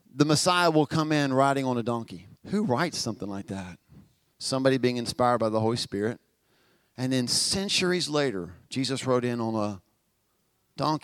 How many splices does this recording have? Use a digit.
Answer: 1